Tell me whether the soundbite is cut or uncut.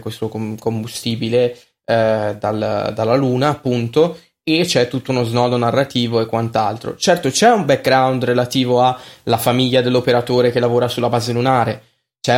uncut